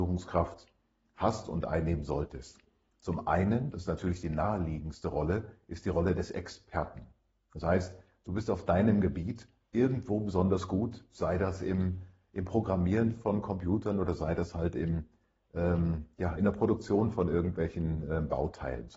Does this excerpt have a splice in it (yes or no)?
no